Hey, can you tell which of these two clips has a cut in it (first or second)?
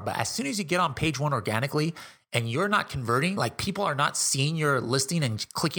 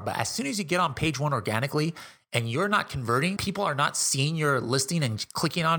second